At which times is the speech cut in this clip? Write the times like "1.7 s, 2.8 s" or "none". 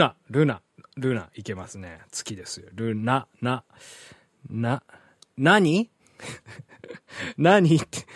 none